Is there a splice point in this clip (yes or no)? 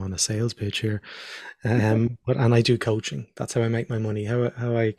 no